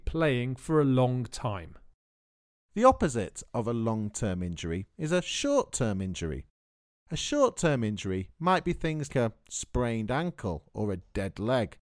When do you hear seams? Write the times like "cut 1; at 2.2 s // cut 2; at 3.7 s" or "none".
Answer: cut 1; at 9.1 s